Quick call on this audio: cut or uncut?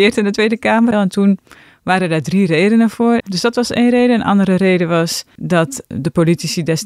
cut